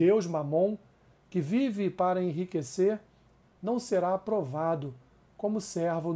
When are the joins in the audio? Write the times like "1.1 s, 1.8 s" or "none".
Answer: 3.4 s